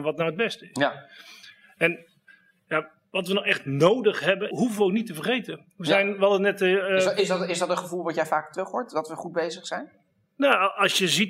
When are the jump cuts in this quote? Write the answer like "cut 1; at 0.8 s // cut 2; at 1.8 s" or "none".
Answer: cut 1; at 4.5 s